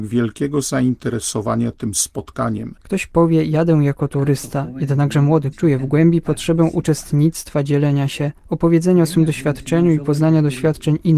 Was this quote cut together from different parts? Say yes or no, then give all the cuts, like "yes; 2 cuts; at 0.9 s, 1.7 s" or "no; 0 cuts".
yes; 2 cuts; at 2.8 s, 5.5 s